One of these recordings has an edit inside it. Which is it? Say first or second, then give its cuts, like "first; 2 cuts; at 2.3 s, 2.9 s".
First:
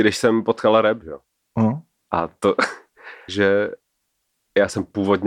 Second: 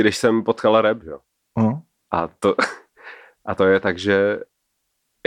first; 1 cut; at 3.3 s